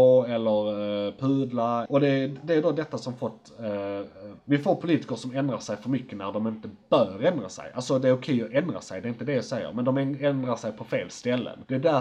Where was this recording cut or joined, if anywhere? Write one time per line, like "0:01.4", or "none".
none